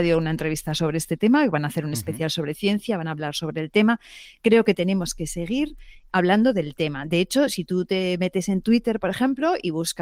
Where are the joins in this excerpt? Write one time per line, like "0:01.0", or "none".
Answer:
none